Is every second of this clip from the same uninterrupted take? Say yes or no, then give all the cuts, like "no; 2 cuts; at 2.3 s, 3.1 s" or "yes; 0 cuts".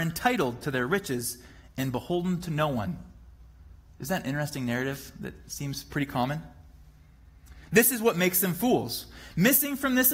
yes; 0 cuts